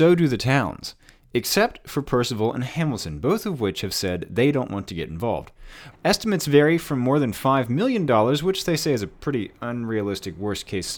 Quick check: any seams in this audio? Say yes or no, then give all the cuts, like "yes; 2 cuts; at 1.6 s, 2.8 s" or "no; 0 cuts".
yes; 1 cut; at 5.9 s